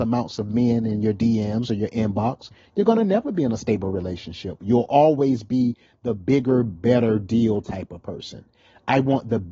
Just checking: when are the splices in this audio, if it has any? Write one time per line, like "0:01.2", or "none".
none